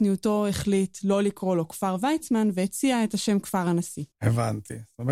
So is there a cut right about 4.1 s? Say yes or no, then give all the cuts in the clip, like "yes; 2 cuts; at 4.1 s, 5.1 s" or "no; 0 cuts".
yes; 1 cut; at 4.1 s